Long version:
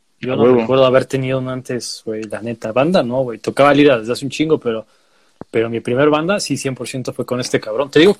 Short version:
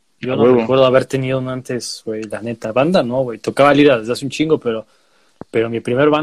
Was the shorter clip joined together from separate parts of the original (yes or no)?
no